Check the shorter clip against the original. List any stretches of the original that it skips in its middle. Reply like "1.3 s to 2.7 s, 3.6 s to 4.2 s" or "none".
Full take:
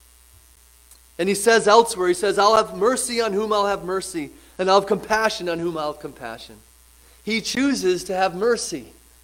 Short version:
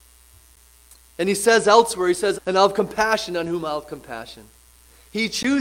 2.3 s to 4.5 s